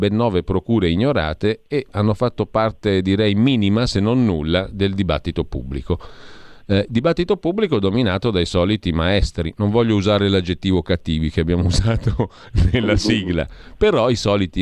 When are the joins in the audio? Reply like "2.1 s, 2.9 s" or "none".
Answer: none